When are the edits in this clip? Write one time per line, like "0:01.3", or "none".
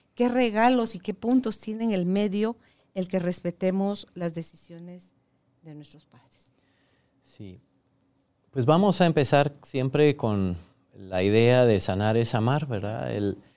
none